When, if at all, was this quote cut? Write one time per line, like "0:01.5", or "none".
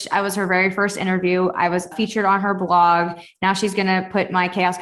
0:01.9